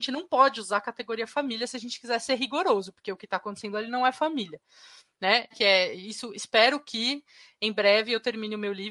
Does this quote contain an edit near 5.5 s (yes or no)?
yes